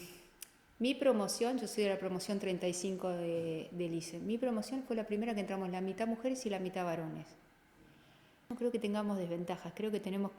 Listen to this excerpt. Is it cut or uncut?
uncut